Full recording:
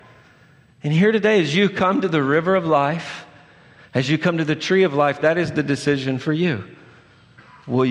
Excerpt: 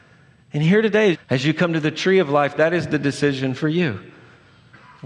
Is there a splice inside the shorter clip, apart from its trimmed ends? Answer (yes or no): yes